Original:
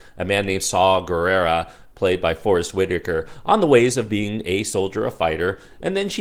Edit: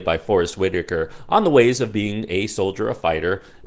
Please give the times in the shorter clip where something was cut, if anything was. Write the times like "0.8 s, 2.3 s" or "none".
none